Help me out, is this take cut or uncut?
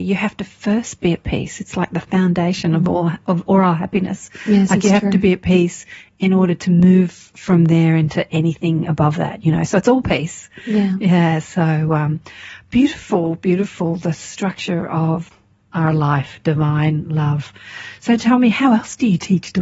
uncut